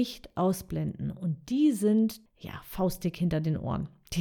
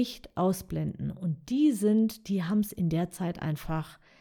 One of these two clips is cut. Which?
first; 1 cut; at 2.3 s

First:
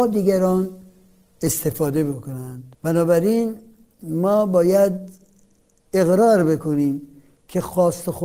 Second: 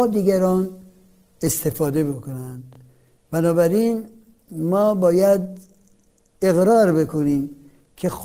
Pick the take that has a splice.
first; 1 cut; at 2.7 s

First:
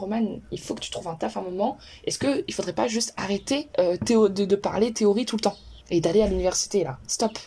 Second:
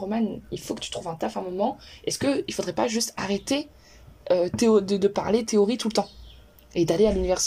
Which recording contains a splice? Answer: first; 2 cuts; at 3.7 s, 5.8 s

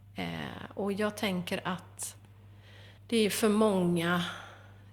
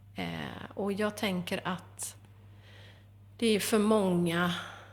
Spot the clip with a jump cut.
first; 1 cut; at 3.0 s

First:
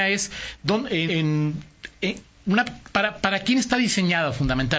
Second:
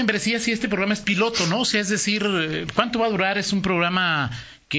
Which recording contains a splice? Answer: first; 1 cut; at 1.1 s

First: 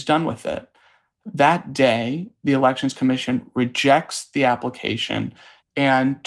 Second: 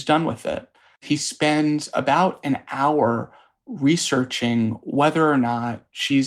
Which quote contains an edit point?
second; 1 cut; at 1.0 s

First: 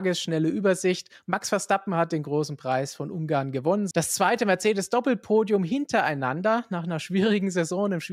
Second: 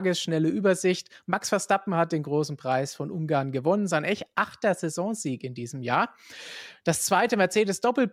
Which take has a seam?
first; 1 cut; at 3.9 s

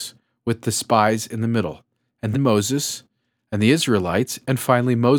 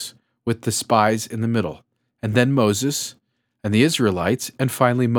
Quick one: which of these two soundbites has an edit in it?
first; 1 cut; at 2.3 s

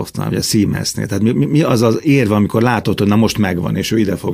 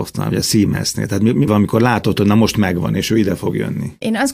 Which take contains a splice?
second; 1 cut; at 1.5 s

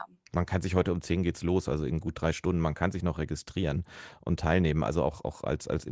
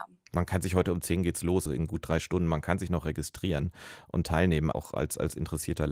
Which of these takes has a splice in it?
second; 2 cuts; at 1.7 s, 4.7 s

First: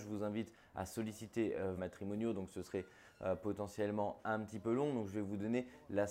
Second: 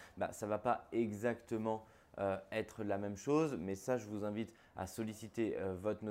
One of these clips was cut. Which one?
first; 1 cut; at 1.8 s

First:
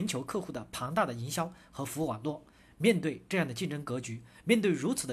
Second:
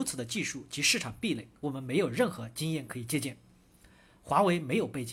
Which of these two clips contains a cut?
second; 1 cut; at 1.6 s

